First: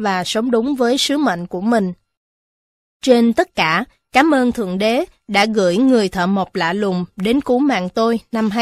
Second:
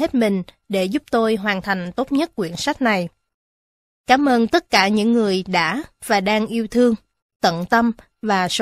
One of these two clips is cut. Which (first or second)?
second